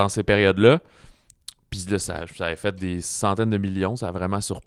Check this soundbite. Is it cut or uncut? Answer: uncut